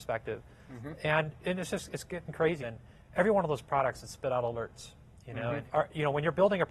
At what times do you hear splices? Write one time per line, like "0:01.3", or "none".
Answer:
0:02.6
0:05.7